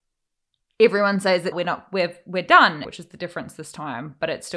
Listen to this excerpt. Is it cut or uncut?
cut